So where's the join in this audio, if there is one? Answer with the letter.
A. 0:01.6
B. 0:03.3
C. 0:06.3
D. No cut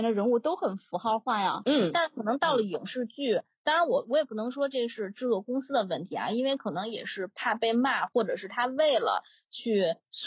A